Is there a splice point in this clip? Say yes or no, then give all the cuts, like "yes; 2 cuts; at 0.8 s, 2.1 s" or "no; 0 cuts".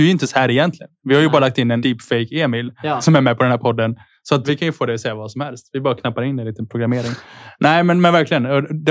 no; 0 cuts